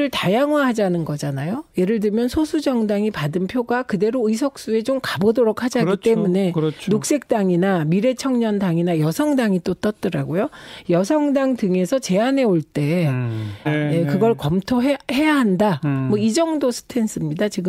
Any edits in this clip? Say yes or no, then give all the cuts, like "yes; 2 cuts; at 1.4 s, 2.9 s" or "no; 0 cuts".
yes; 1 cut; at 13.7 s